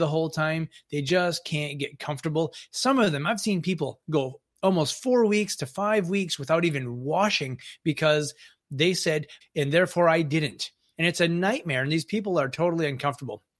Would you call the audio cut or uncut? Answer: cut